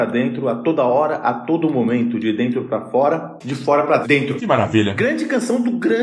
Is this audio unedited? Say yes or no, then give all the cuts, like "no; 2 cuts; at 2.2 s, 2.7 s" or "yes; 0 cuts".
yes; 0 cuts